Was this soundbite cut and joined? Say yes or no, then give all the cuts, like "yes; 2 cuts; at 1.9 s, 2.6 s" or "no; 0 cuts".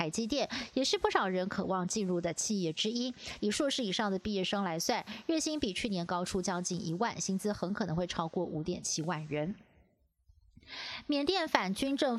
yes; 1 cut; at 3.4 s